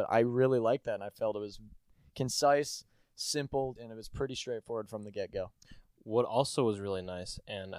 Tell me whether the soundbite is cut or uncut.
cut